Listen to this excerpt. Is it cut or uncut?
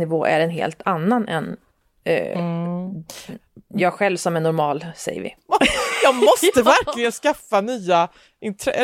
cut